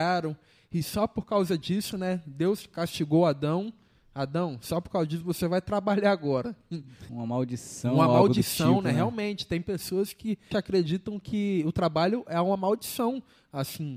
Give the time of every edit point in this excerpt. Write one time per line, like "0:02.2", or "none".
0:07.1
0:10.5